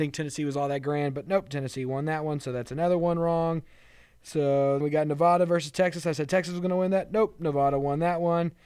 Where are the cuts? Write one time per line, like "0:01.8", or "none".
0:04.8